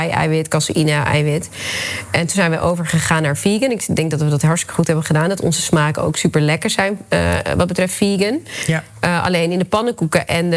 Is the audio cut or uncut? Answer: uncut